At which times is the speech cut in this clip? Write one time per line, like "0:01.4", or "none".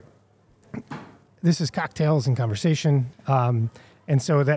0:01.3
0:03.1